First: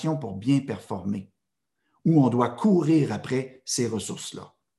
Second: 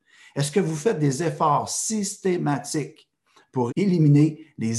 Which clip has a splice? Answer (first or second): second